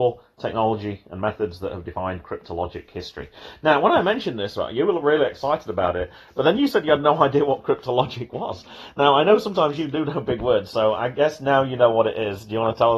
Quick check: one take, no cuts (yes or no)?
yes